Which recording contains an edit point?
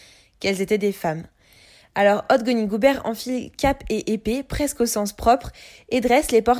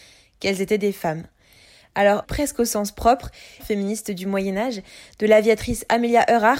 second; 2 cuts; at 2.2 s, 3.6 s

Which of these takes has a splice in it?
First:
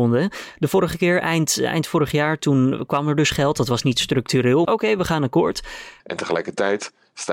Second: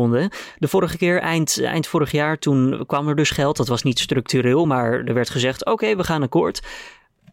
first; 2 cuts; at 4.6 s, 6.0 s

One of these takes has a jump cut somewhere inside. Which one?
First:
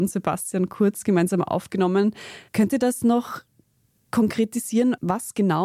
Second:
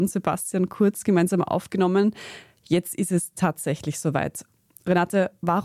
first; 1 cut; at 2.5 s

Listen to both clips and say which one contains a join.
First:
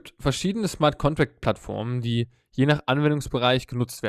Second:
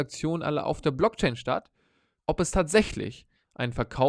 second; 1 cut; at 2.2 s

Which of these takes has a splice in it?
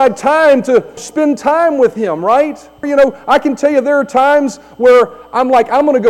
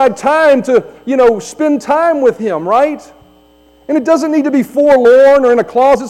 first; 2 cuts; at 1.0 s, 2.8 s

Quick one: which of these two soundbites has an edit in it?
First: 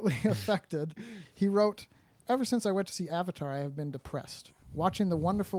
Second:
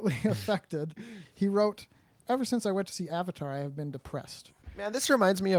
second; 1 cut; at 4.6 s

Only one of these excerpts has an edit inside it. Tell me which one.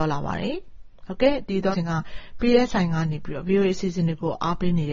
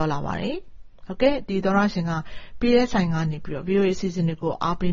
first; 1 cut; at 1.7 s

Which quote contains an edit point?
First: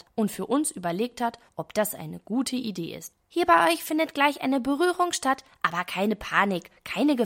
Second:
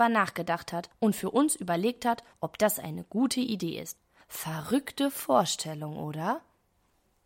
first; 1 cut; at 3.2 s

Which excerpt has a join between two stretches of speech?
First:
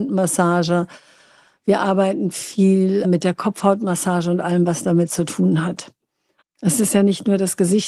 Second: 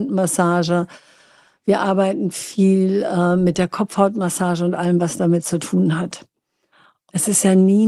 first; 2 cuts; at 3.0 s, 6.4 s

